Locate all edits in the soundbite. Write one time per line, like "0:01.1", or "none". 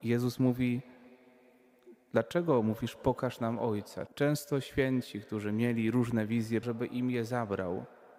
0:04.1
0:06.6

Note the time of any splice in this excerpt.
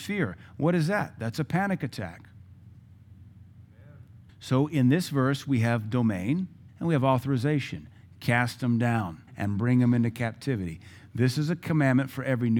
0:04.3
0:06.7
0:09.3

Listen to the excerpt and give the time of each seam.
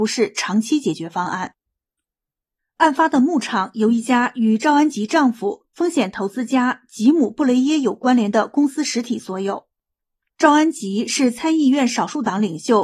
0:02.6
0:10.3

